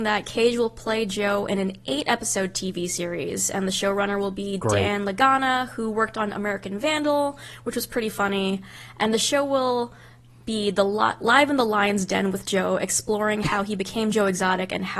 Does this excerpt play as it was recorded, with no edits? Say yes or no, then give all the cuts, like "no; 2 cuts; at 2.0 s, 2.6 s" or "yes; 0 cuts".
yes; 0 cuts